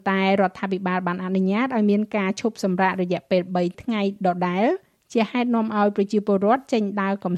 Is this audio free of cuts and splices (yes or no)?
yes